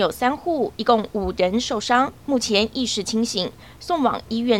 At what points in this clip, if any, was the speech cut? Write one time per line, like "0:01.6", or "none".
none